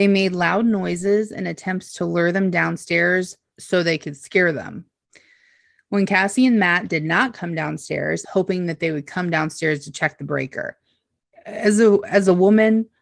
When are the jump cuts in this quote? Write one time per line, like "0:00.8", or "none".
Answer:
0:03.5
0:08.2